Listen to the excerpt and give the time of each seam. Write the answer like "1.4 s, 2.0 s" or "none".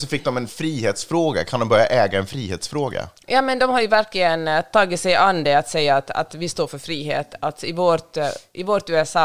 none